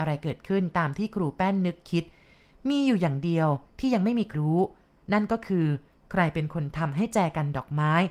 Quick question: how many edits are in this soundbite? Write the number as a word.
one